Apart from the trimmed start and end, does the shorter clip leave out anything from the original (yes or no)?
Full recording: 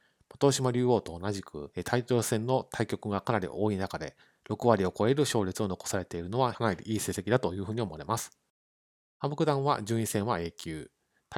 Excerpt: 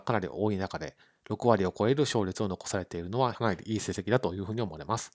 no